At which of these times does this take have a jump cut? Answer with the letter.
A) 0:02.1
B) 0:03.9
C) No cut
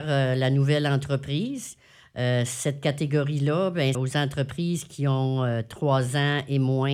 B